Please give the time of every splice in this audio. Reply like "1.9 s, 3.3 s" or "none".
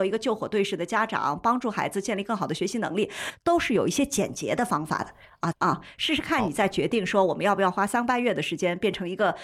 5.5 s